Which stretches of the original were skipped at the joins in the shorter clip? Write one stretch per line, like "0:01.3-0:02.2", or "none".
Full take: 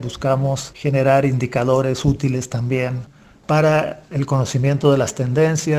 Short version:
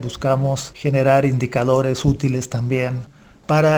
none